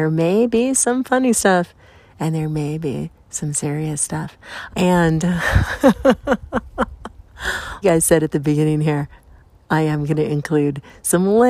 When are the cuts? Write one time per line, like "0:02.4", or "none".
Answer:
0:04.7
0:07.8